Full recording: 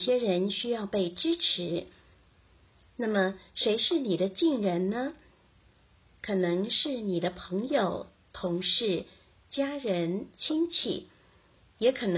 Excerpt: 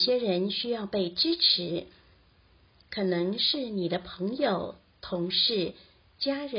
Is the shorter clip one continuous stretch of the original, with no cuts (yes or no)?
no